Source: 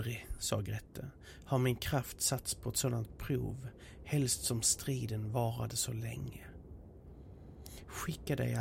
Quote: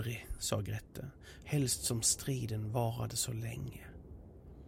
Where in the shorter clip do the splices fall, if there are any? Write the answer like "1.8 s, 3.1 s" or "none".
1.4 s